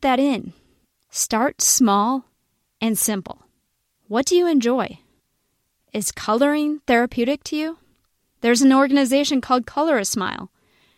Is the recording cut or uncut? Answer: uncut